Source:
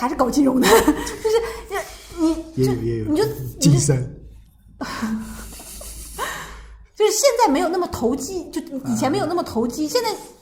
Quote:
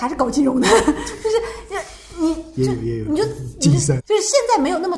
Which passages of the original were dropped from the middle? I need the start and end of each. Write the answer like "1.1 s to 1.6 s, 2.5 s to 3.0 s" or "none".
4.0 s to 6.9 s